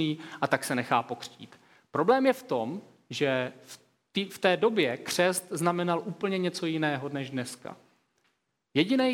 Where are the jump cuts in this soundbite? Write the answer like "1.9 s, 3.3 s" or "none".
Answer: none